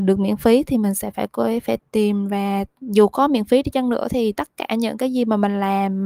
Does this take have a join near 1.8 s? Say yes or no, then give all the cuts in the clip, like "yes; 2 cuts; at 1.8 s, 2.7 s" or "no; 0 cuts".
yes; 1 cut; at 1.8 s